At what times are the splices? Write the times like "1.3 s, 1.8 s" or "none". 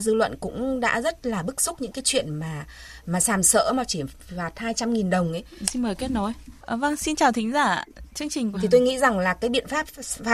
5.6 s, 8.5 s